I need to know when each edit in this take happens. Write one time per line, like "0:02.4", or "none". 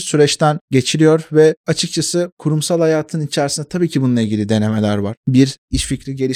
0:05.2